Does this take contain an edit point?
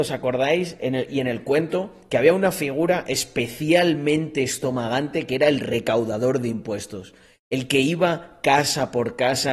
no; 0 cuts

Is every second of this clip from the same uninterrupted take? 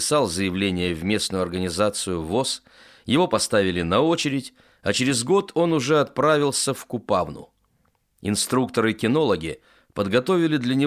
yes; 0 cuts

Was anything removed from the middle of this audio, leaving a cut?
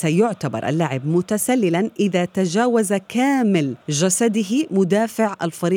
yes; 1 cut; at 3.8 s

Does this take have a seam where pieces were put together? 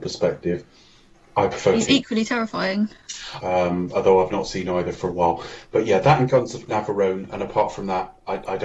yes; 1 cut; at 3.4 s

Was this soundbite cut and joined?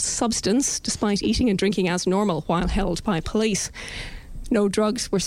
no; 0 cuts

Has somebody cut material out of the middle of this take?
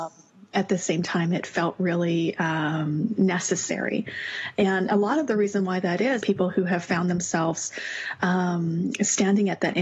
yes; 1 cut; at 6.2 s

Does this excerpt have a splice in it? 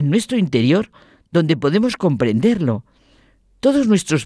no; 0 cuts

